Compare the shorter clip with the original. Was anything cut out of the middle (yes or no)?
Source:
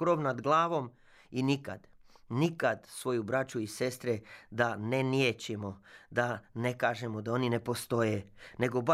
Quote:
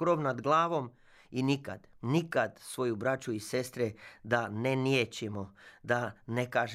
yes